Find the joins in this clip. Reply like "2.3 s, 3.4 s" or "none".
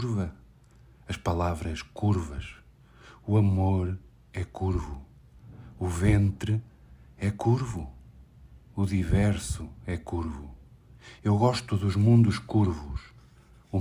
none